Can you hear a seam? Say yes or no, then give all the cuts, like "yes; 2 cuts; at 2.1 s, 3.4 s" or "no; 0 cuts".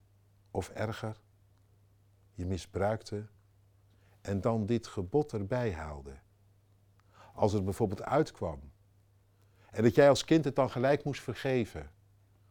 no; 0 cuts